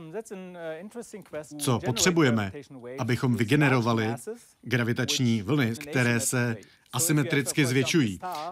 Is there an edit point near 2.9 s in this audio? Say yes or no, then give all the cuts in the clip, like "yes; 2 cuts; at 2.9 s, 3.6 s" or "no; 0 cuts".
no; 2 cuts; at 1.5 s, 5.8 s